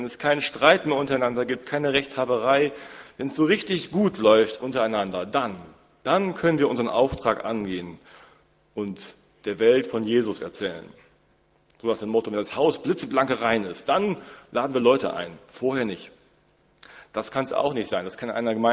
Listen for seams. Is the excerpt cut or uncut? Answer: uncut